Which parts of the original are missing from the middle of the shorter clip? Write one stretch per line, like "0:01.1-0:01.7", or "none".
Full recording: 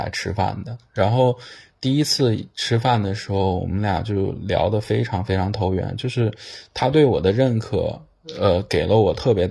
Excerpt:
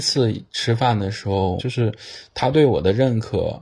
0:03.6-0:06.0